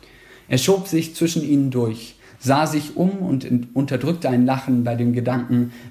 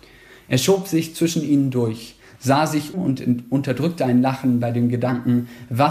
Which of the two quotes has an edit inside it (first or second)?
second